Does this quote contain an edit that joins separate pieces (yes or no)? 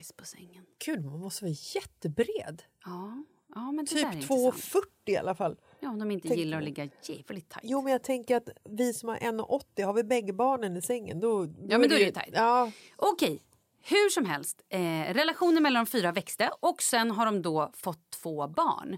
no